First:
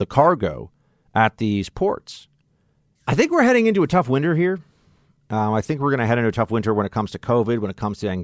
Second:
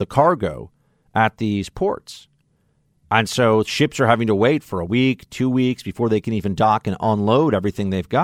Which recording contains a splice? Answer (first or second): first